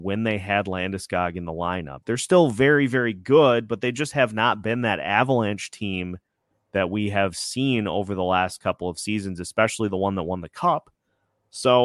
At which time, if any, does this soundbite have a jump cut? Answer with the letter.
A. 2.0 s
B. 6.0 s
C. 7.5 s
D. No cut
A